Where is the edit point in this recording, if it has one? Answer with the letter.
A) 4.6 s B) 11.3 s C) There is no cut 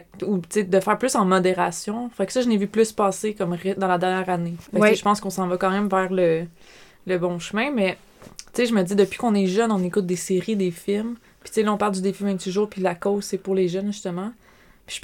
A